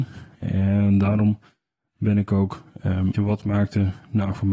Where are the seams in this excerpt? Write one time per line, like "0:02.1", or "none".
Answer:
0:03.1